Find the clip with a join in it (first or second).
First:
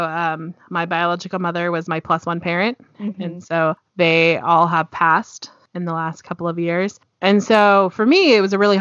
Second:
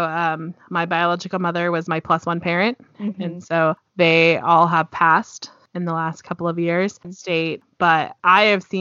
second